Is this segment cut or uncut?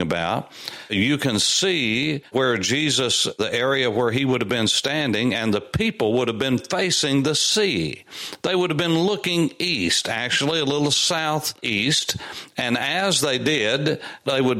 uncut